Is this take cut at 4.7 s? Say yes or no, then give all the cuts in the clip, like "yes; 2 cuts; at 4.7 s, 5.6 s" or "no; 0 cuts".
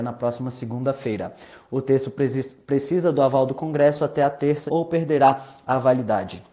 yes; 1 cut; at 4.7 s